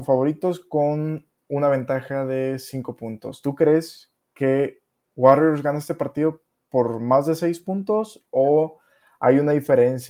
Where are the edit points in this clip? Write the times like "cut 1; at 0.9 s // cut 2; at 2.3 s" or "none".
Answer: none